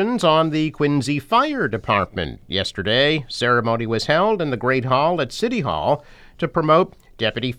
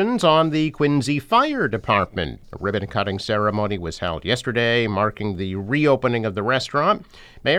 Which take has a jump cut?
second; 1 cut; at 2.4 s

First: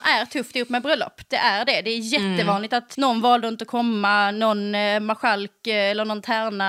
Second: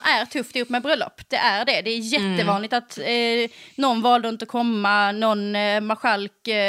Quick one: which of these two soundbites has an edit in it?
first; 1 cut; at 2.9 s

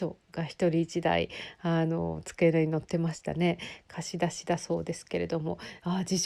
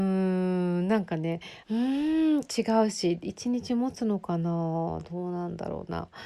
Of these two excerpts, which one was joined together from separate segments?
second; 1 cut; at 1.6 s

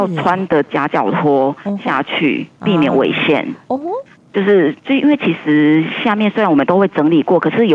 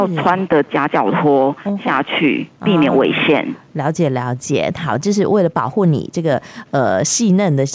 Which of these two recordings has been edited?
first; 1 cut; at 3.6 s

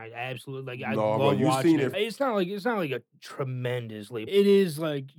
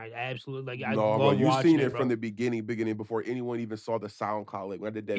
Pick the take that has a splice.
first; 2 cuts; at 1.9 s, 4.3 s

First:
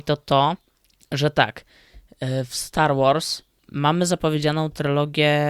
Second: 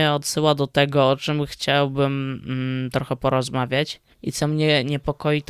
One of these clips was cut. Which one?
second; 1 cut; at 4.1 s

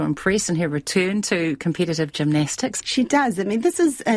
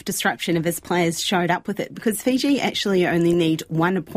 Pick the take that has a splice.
first; 1 cut; at 2.8 s

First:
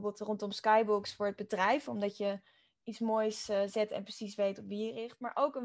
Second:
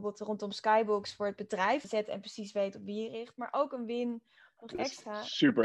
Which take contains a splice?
second; 1 cut; at 1.8 s

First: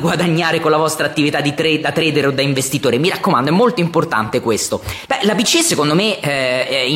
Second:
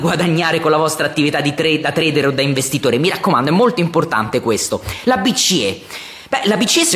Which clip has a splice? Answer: first; 1 cut; at 5.1 s

